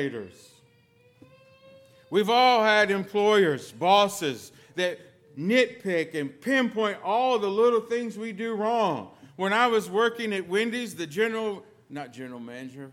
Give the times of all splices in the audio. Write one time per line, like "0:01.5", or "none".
none